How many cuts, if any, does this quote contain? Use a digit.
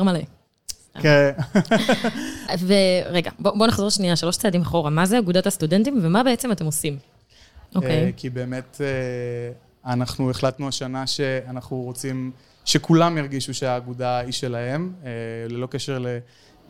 1